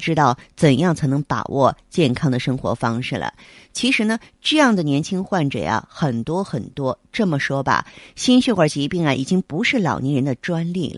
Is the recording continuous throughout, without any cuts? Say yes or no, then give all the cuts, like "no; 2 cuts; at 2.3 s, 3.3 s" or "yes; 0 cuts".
yes; 0 cuts